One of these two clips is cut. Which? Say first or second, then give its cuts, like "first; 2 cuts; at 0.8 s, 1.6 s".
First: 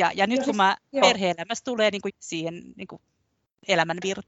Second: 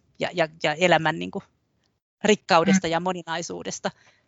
first; 2 cuts; at 1.0 s, 2.1 s